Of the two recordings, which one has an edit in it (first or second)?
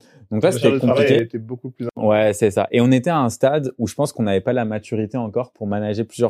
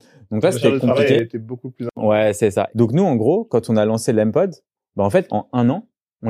second